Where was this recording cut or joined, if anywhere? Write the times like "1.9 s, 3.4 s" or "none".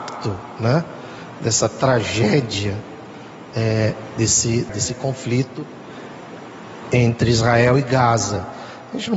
4.7 s

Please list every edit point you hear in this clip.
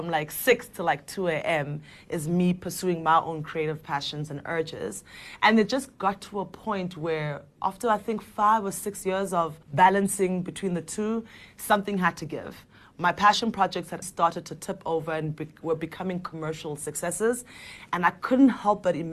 9.6 s, 14.0 s

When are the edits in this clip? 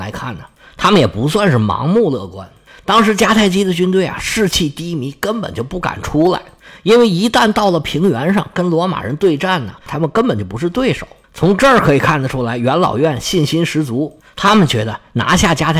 9.9 s, 11.2 s

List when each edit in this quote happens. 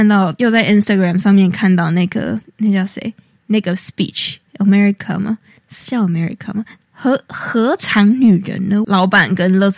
6.9 s, 8.8 s

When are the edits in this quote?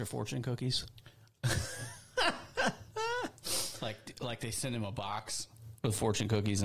none

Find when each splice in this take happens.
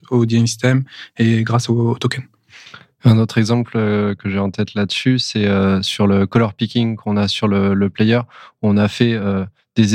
none

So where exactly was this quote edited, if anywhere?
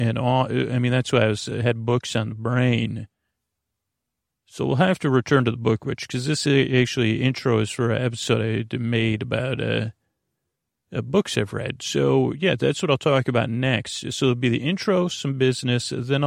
none

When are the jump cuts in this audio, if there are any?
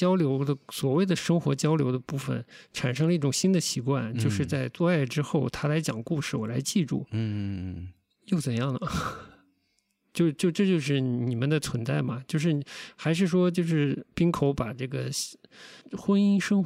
none

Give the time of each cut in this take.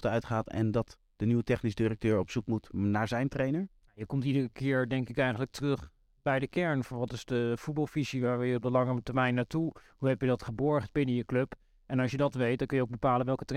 none

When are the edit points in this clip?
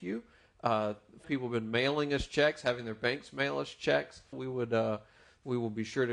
1.2 s, 4.3 s

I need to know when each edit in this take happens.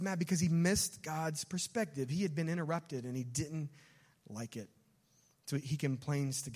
none

